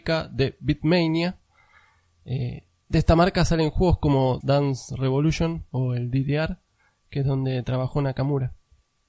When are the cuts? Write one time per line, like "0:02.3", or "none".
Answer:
0:04.4
0:07.0